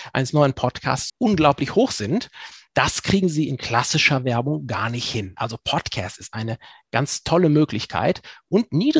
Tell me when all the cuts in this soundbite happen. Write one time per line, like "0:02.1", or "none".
0:01.1